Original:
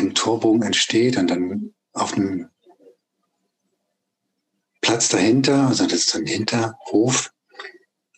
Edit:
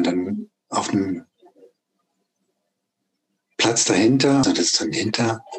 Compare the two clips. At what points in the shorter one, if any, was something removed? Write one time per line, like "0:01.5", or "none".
0:04.4